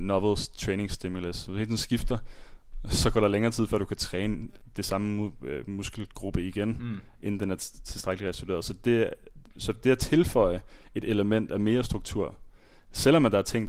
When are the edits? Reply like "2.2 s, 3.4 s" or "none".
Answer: none